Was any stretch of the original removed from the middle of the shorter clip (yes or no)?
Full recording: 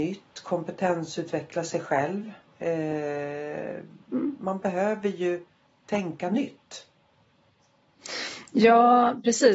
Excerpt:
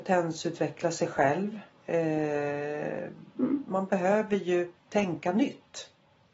yes